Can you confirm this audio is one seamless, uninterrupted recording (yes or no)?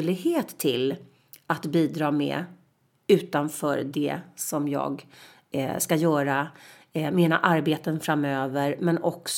yes